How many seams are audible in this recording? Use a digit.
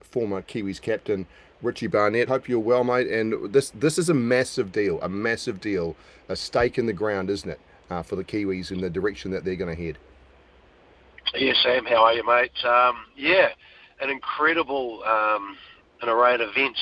1